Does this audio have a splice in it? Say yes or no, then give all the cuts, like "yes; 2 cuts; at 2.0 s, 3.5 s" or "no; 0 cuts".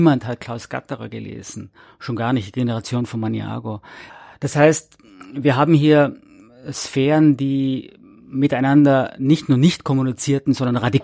no; 0 cuts